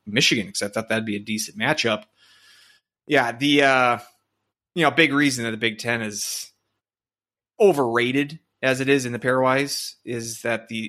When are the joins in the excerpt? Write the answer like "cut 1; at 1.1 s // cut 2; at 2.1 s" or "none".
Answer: none